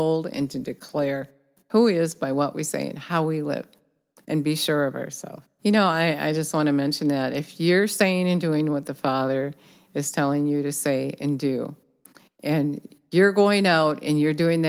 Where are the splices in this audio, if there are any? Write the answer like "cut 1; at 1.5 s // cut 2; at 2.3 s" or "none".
cut 1; at 5.6 s